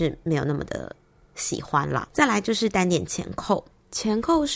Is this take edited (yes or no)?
no